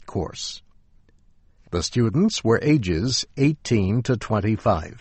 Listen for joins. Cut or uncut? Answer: cut